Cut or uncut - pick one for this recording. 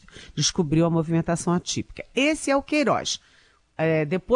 uncut